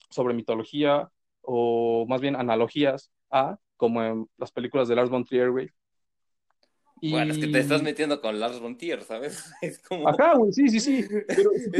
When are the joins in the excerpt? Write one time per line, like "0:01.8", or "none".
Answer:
0:03.7